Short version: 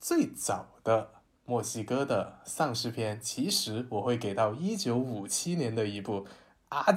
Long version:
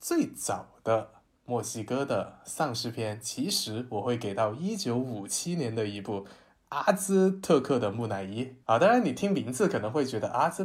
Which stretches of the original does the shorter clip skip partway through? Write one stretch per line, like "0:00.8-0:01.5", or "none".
none